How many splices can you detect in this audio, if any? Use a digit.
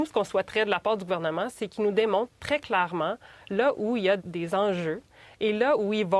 1